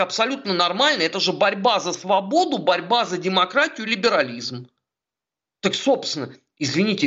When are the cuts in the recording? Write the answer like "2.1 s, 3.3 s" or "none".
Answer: none